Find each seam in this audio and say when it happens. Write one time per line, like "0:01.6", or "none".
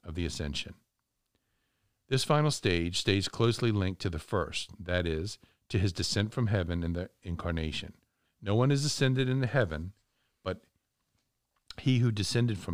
0:08.3